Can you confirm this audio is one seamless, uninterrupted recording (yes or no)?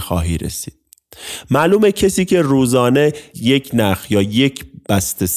no